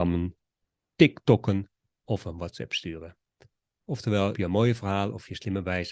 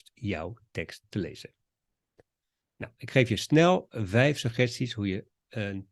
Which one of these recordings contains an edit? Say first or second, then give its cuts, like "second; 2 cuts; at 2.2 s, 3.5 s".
first; 1 cut; at 4.3 s